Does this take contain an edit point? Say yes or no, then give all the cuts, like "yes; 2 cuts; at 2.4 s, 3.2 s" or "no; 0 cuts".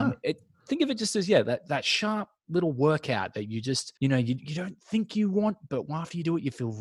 yes; 1 cut; at 4.0 s